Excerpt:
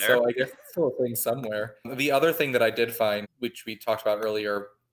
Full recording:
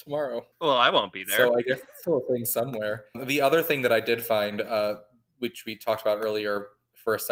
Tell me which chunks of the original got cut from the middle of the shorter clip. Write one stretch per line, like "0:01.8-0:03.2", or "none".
0:04.5-0:05.2